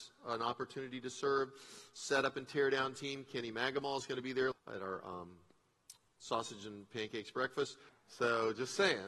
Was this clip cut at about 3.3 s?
no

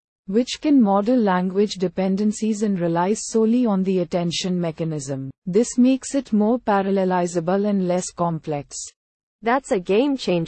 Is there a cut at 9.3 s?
no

